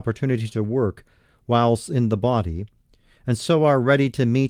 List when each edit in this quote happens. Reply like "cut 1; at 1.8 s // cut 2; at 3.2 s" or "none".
none